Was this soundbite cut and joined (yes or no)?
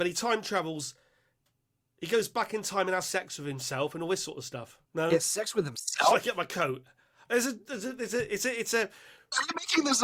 yes